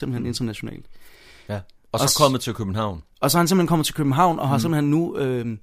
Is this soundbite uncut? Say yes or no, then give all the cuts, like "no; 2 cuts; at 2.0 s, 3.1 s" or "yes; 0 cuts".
no; 1 cut; at 1.5 s